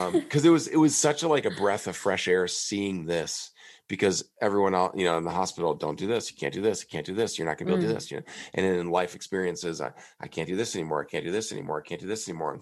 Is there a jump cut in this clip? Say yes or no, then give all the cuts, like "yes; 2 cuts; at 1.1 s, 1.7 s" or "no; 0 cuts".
no; 0 cuts